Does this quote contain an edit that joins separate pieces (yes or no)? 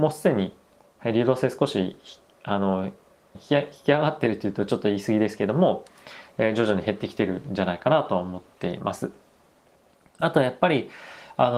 yes